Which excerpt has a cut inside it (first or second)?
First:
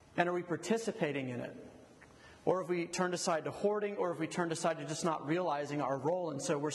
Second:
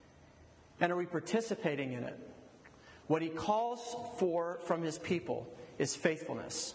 second